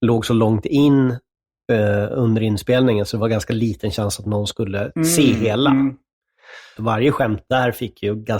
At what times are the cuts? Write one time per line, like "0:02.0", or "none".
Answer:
0:06.8